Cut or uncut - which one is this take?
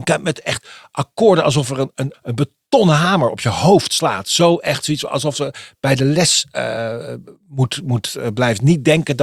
cut